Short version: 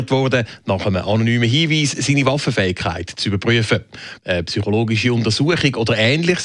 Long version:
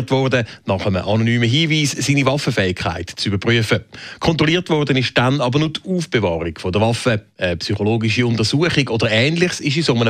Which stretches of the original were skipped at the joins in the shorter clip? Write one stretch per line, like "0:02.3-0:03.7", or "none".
0:04.2-0:07.3